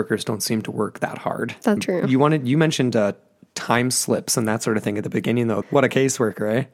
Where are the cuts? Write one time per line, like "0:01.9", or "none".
0:01.8
0:05.6